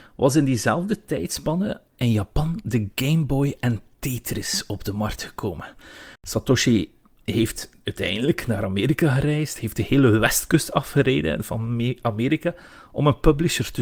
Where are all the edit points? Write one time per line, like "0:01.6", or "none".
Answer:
0:06.2